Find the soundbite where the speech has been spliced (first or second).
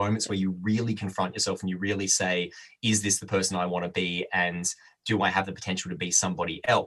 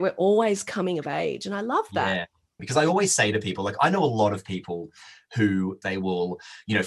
second